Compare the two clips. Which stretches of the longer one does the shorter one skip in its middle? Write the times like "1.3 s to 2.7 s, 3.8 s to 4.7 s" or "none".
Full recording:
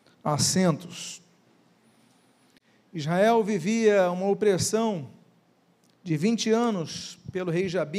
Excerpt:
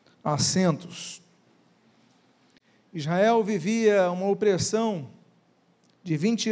none